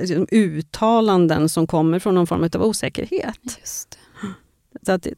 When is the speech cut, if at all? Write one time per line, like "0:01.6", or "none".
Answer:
none